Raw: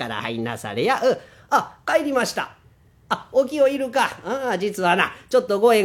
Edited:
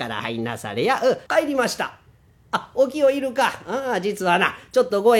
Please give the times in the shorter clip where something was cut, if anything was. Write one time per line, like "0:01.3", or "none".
0:01.3